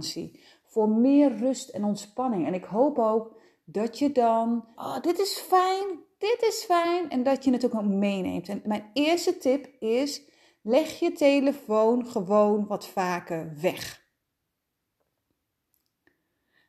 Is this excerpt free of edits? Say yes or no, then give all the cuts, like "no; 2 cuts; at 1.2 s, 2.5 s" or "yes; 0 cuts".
no; 1 cut; at 4.8 s